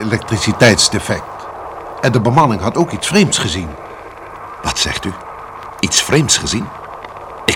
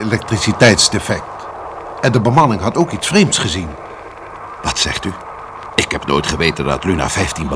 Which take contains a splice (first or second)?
second